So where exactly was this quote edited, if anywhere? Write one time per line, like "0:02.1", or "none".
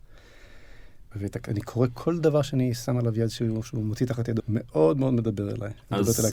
0:01.1
0:04.4